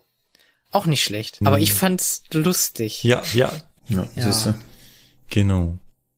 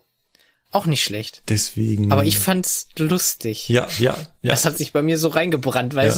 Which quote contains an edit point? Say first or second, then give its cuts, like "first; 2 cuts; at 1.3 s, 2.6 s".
first; 2 cuts; at 1.4 s, 3.8 s